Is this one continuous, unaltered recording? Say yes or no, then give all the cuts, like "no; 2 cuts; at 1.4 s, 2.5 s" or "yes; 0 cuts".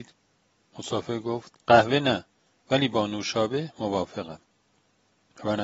no; 1 cut; at 1.6 s